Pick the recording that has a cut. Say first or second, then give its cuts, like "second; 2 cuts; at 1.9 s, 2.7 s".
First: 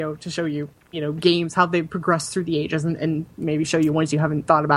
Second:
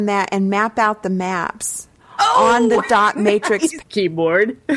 second; 1 cut; at 3.8 s